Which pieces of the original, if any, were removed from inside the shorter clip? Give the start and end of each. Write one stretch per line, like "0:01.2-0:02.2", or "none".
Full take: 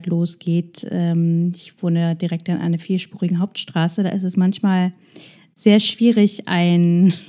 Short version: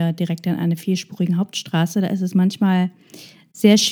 none